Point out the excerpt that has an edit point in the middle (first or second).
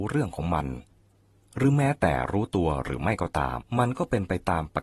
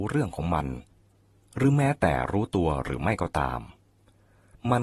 first